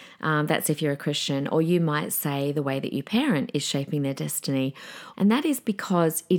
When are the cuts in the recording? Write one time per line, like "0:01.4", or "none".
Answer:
0:05.1